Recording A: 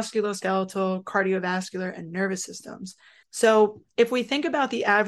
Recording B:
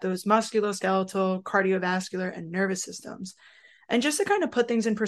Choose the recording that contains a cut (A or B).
A